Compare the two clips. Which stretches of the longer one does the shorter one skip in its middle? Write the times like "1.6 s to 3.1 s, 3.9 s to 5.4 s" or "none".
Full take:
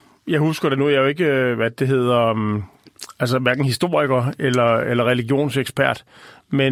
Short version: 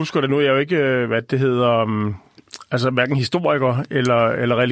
none